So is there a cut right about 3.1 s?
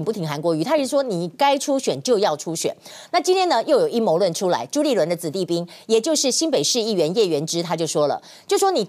no; 0 cuts

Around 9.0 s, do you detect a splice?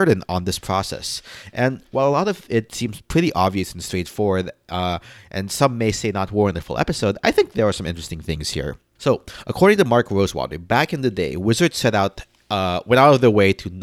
yes; 1 cut; at 9.0 s

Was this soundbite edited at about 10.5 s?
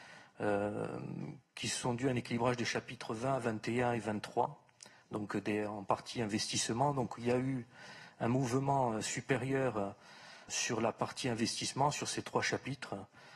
yes; 1 cut; at 10.5 s

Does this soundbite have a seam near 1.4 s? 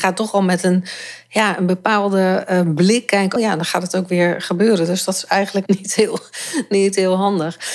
no; 2 cuts; at 3.4 s, 5.7 s

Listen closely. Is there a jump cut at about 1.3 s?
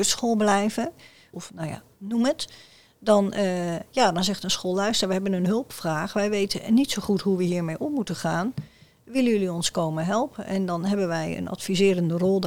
yes; 1 cut; at 1.3 s

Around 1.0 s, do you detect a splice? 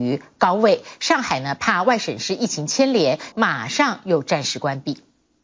no; 1 cut; at 3.3 s

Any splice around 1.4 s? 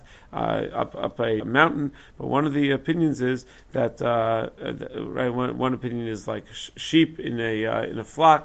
yes; 1 cut; at 1.4 s

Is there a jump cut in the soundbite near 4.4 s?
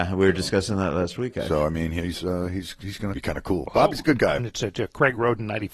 yes; 2 cuts; at 3.1 s, 4.4 s

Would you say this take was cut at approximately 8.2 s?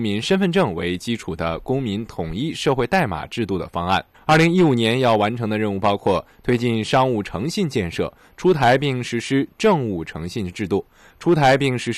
no; 1 cut; at 4.1 s

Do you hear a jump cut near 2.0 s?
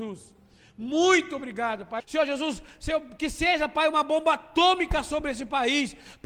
yes; 1 cut; at 2.0 s

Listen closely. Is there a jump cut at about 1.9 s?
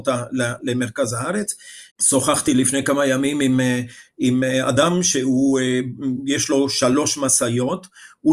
yes; 1 cut; at 1.9 s

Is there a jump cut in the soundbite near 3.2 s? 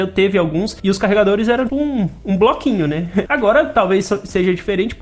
yes; 2 cuts; at 1.7 s, 3.2 s

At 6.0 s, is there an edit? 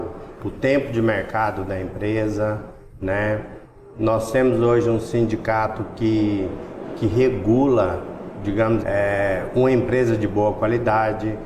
no; 1 cut; at 8.8 s

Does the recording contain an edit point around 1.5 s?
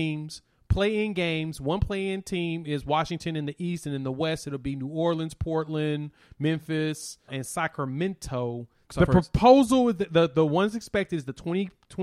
no; 2 cuts; at 7.3 s, 8.9 s

